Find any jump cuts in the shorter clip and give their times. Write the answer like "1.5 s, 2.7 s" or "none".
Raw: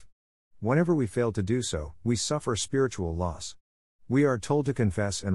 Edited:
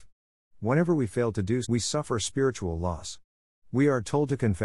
1.6 s